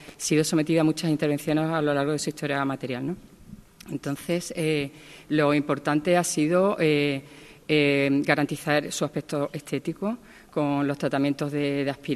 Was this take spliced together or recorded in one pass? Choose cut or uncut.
uncut